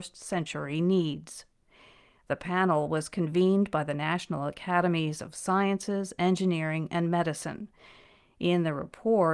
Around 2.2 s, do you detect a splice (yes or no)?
no